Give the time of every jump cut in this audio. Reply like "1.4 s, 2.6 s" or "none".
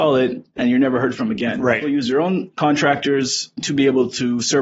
none